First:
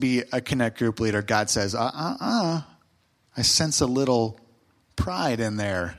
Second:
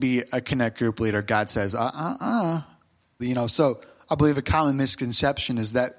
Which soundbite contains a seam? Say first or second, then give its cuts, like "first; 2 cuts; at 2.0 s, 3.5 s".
second; 1 cut; at 3.2 s